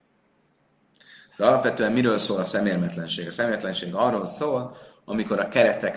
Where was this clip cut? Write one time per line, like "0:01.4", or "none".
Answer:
none